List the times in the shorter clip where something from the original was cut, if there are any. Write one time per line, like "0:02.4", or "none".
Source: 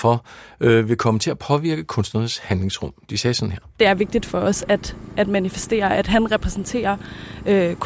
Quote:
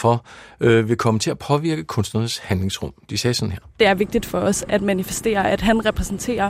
0:04.7

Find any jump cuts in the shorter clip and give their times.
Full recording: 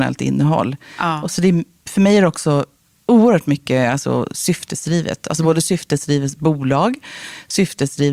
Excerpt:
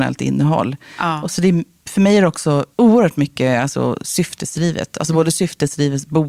0:02.7

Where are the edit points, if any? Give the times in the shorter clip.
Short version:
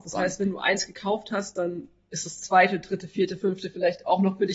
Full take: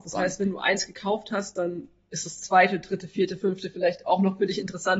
none

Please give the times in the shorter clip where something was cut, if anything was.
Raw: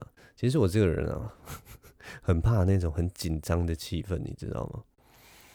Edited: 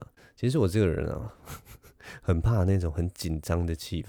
none

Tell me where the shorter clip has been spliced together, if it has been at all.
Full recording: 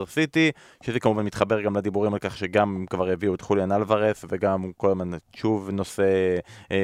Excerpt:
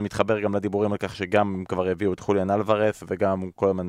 none

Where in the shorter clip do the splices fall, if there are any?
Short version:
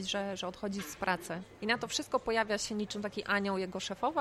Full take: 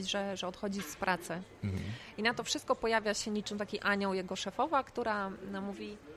0:01.6

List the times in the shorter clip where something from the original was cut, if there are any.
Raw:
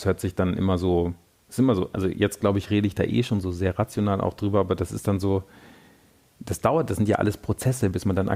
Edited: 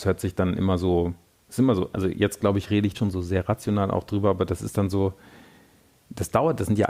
0:02.9

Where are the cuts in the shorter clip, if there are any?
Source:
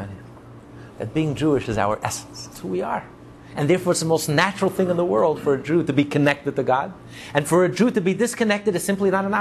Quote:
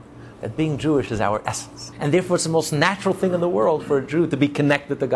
0:01.9

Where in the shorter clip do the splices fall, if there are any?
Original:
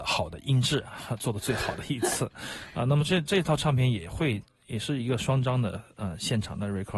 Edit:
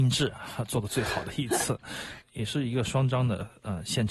0:02.2

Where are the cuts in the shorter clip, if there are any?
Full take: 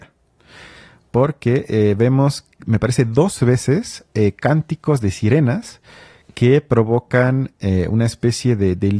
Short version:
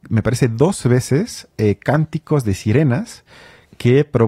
none

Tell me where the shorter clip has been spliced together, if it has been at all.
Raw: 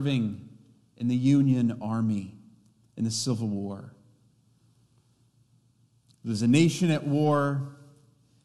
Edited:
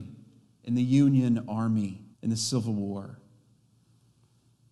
0:02.1

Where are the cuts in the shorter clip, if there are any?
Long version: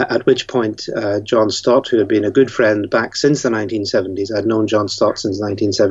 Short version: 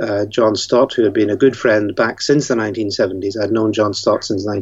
none

